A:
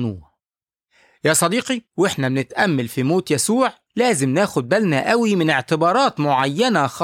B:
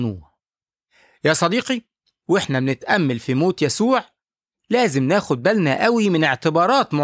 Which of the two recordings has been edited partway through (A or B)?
A